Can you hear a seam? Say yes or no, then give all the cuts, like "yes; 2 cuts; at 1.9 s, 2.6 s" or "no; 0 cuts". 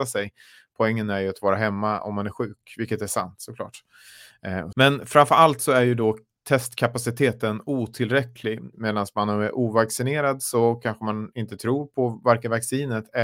yes; 2 cuts; at 4.7 s, 8.7 s